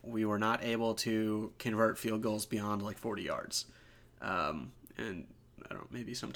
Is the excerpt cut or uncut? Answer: uncut